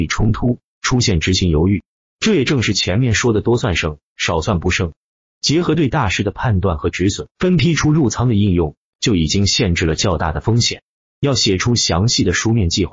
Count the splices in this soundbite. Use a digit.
2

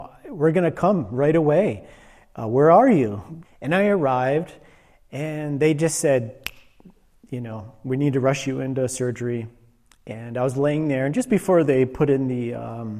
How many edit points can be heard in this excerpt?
1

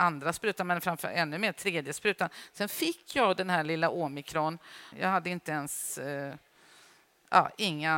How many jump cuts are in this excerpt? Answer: 1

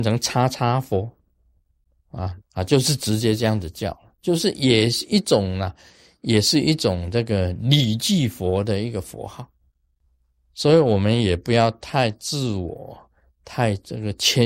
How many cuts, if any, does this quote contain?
1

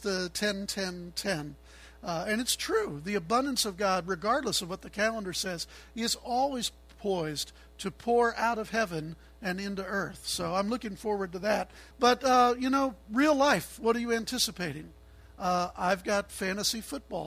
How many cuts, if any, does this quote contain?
1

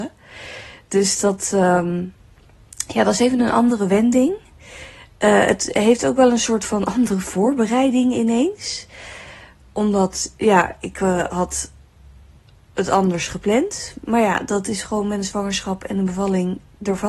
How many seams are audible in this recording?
0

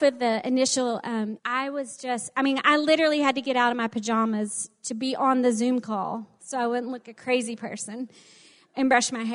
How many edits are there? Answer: 2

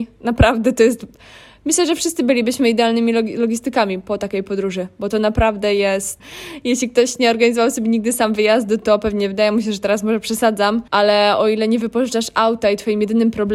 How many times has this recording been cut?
2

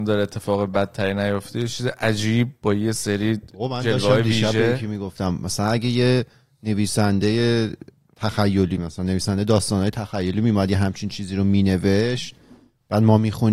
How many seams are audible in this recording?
0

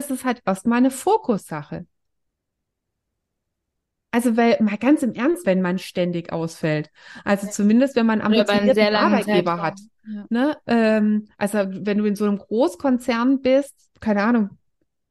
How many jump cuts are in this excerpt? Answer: 2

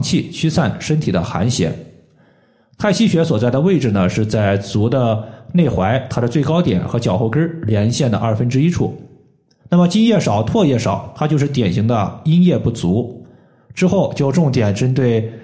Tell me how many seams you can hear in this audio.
1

